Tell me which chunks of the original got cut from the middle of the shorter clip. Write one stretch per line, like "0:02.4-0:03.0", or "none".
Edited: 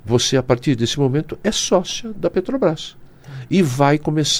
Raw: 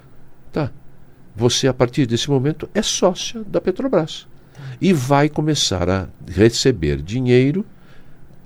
none

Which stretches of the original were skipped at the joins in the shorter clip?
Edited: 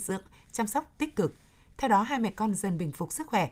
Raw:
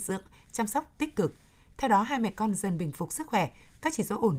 none

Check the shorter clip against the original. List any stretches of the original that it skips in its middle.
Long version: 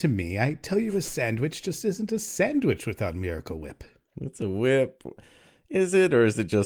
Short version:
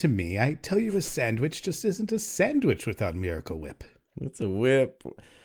none

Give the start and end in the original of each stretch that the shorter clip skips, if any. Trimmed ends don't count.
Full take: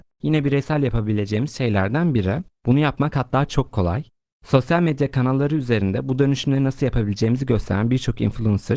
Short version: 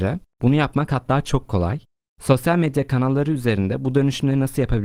none

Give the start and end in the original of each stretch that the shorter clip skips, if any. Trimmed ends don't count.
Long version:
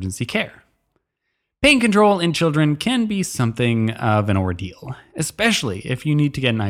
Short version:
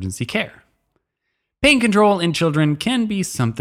none

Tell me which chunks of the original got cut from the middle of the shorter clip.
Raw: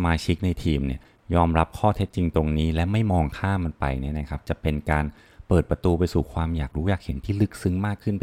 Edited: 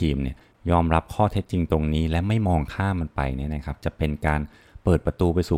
none

